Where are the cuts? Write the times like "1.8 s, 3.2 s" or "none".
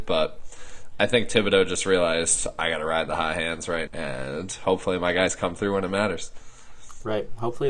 3.9 s